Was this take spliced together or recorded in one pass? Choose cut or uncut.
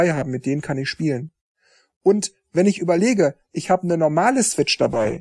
uncut